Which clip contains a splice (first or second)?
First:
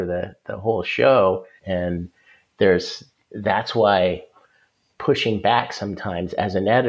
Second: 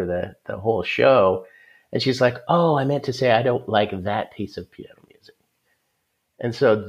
first